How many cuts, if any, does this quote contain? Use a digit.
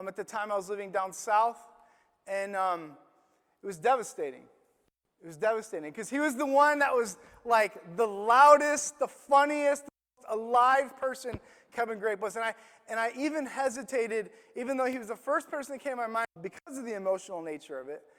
1